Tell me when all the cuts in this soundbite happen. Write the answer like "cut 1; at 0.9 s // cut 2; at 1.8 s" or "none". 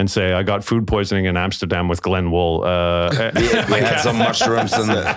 none